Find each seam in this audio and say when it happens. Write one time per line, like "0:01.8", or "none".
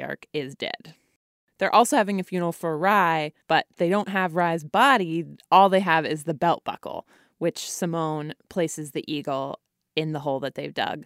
0:03.4